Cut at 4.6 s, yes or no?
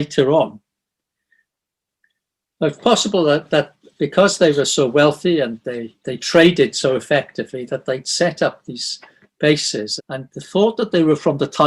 no